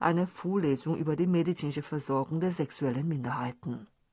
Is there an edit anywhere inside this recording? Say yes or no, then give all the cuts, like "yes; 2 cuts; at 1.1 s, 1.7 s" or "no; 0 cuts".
no; 0 cuts